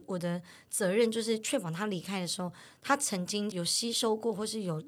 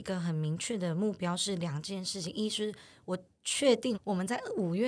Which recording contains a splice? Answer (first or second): second